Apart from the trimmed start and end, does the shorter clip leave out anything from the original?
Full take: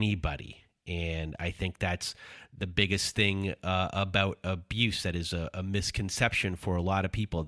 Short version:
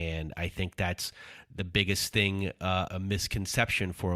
yes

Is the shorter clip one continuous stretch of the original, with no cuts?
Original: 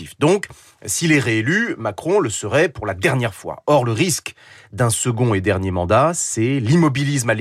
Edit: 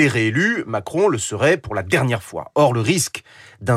yes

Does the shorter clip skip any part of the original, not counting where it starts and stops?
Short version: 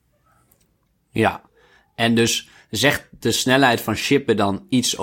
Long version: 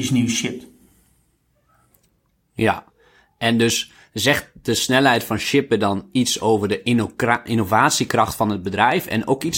no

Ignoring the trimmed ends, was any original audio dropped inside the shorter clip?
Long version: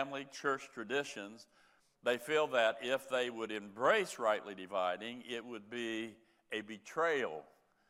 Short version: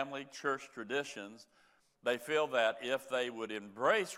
no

